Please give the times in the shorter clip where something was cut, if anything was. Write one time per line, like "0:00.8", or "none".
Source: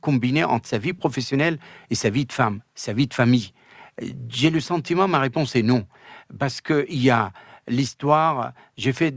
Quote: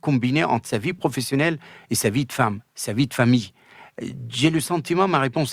none